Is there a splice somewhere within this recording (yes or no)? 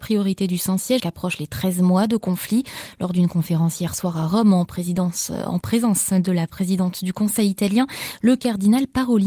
yes